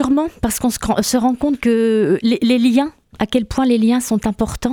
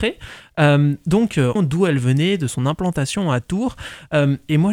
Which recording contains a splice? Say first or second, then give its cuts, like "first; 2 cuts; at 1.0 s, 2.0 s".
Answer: second; 1 cut; at 1.6 s